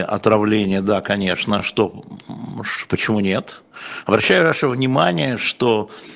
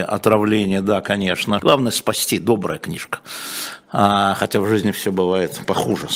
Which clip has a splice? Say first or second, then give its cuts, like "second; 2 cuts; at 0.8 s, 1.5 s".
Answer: second; 1 cut; at 1.6 s